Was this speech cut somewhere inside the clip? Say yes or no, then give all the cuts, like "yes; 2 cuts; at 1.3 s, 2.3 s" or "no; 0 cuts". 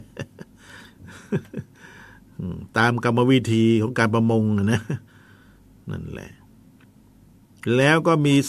no; 0 cuts